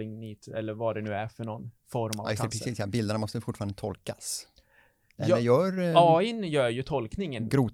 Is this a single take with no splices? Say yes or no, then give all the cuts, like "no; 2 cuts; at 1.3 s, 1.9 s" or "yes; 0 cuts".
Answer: yes; 0 cuts